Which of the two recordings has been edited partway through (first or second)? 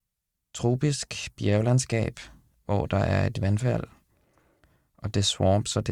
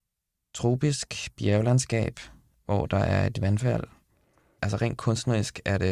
second